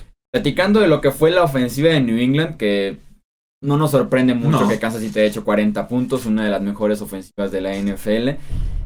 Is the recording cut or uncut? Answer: uncut